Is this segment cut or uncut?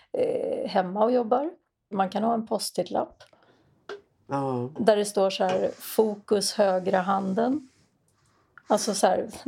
cut